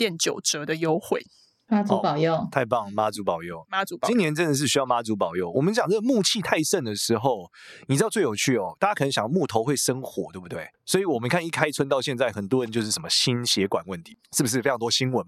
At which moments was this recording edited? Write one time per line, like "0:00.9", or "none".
0:10.7
0:14.2